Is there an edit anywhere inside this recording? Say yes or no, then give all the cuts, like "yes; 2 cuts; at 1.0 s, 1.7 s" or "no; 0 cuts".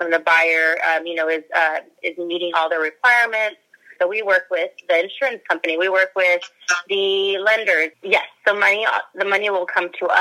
yes; 2 cuts; at 4.0 s, 7.9 s